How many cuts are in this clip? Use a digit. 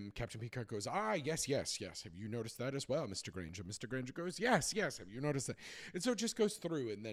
0